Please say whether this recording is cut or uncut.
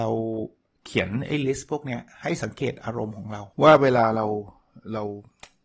cut